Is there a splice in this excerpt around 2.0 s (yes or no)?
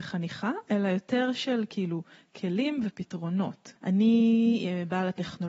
no